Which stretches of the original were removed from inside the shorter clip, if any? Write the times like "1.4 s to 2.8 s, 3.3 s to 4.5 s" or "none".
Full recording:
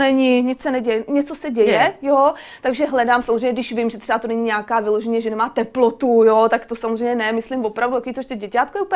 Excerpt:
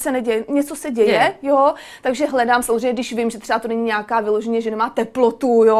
none